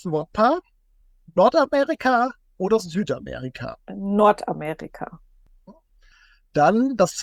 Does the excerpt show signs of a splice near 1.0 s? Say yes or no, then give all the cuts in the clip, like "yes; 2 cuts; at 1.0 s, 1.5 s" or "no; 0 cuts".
no; 0 cuts